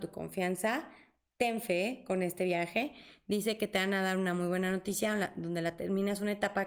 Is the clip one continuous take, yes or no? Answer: yes